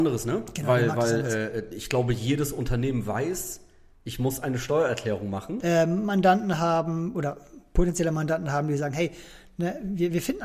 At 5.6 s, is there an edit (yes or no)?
yes